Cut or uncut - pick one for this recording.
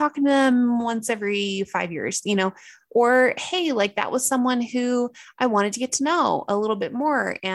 uncut